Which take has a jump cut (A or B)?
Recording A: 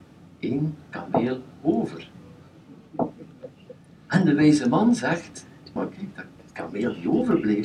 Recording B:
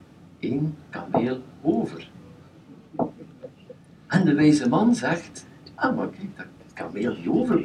A